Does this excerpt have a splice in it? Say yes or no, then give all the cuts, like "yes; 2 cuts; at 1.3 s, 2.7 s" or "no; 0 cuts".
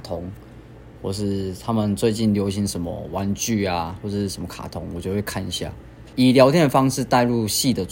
yes; 1 cut; at 6.1 s